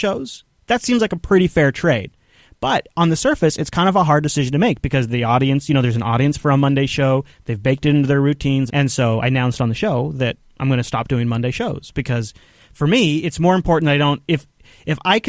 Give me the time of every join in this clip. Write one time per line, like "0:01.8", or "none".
0:08.7